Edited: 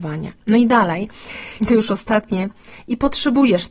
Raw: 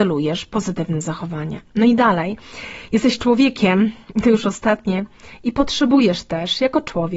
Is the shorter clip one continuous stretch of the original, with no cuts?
no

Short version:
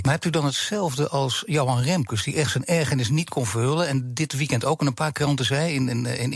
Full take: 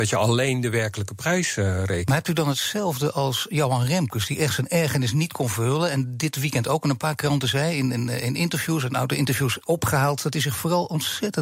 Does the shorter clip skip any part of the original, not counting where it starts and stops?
no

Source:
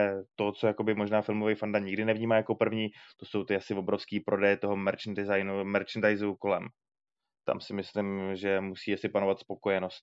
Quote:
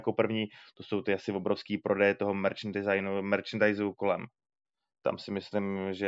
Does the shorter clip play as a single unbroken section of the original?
yes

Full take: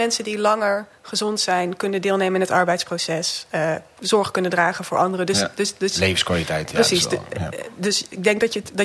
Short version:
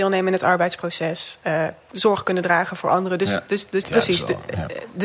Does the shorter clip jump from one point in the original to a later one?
yes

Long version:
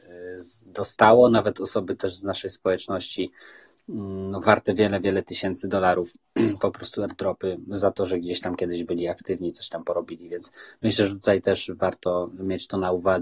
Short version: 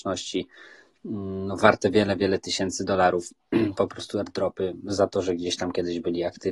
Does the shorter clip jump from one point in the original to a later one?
no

